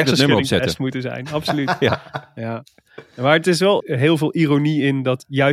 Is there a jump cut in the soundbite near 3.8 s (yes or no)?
yes